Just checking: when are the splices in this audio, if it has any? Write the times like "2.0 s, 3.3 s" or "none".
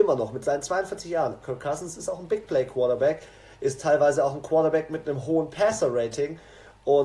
1.4 s